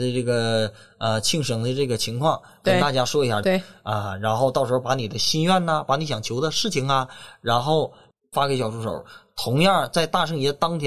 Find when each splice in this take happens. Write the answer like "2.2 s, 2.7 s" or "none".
3.4 s